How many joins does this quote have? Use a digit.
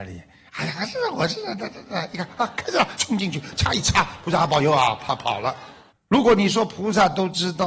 2